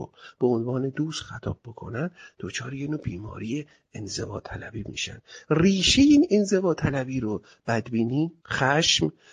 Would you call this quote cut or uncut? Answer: cut